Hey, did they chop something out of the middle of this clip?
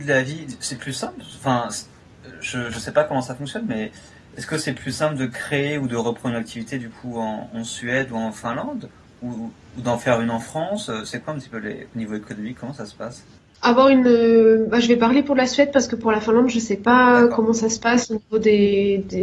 no; 0 cuts

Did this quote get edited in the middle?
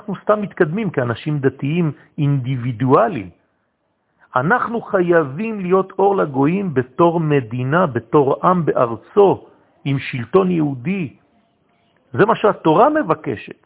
no; 0 cuts

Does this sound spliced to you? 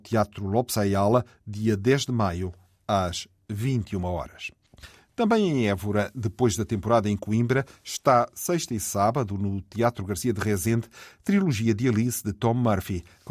no; 0 cuts

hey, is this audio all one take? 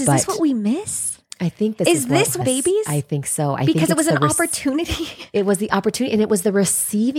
no; 1 cut; at 2.4 s

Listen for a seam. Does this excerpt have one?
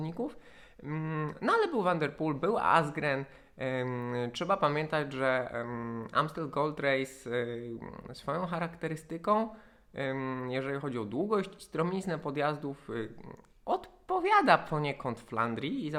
no; 0 cuts

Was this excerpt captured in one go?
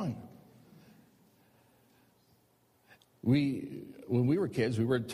yes; 0 cuts

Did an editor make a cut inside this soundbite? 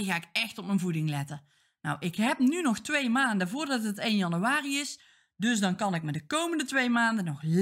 no; 0 cuts

